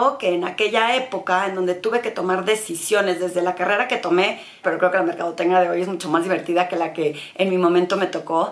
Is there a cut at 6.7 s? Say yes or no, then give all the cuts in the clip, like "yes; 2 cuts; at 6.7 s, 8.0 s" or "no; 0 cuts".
no; 1 cut; at 4.6 s